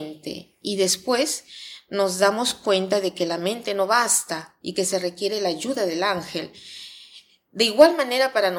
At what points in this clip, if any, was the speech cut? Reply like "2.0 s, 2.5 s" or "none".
none